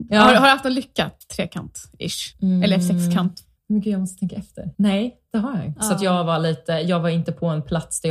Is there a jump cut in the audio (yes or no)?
yes